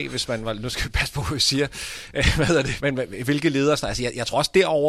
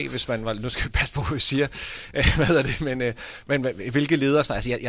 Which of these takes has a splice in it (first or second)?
first